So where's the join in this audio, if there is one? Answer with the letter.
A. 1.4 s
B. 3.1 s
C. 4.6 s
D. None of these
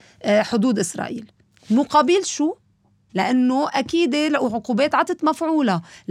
B